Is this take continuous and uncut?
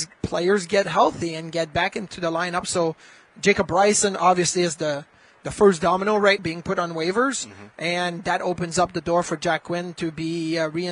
no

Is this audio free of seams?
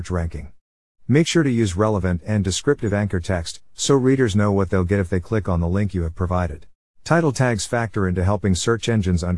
no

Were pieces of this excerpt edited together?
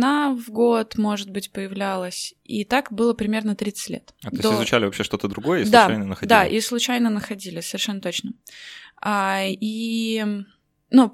no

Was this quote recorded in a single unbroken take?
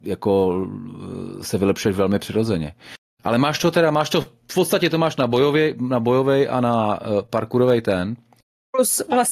yes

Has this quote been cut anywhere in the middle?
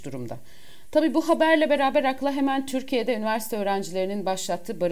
no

